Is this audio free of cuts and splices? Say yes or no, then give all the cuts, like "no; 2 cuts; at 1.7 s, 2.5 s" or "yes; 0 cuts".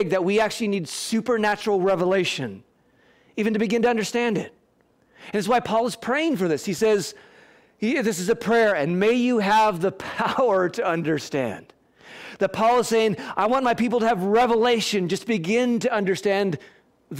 yes; 0 cuts